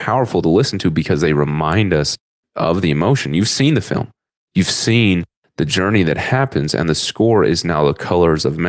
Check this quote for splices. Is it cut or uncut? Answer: uncut